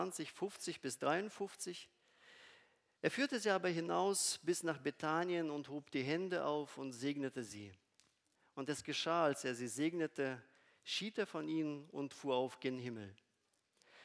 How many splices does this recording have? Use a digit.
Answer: 0